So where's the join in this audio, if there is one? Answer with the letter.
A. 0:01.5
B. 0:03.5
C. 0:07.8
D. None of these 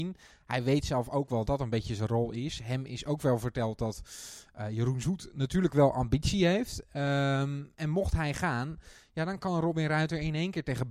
A